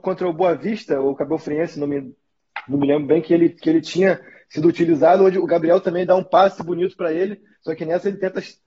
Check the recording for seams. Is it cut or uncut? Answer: uncut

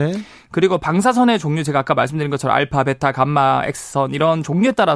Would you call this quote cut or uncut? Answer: uncut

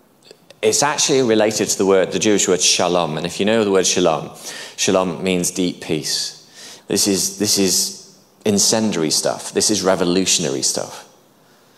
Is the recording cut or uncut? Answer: cut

